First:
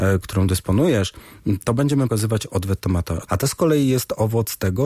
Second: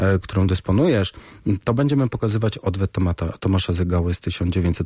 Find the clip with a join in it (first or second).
first